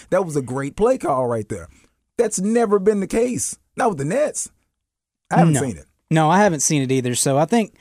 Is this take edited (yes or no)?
no